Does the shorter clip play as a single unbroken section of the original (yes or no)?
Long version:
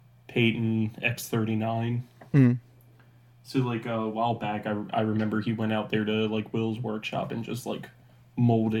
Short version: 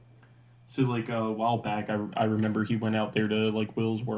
yes